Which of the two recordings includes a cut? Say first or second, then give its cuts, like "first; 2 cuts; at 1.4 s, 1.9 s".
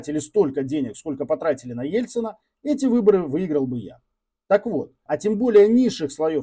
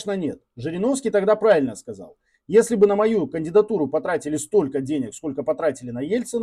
first; 1 cut; at 5.1 s